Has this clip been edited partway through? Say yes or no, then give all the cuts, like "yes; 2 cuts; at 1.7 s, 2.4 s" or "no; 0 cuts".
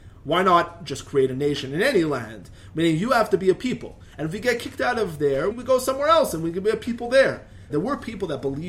yes; 2 cuts; at 5.5 s, 7.7 s